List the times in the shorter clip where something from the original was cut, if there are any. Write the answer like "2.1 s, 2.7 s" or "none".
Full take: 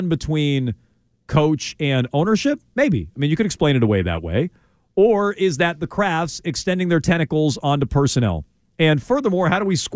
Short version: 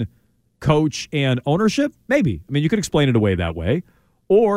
none